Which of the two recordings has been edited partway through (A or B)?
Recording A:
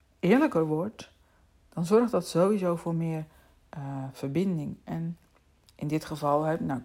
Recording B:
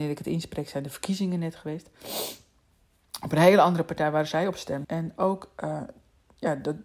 B